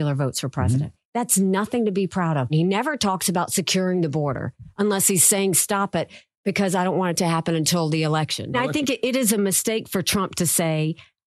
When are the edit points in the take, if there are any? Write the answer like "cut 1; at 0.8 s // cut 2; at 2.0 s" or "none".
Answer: none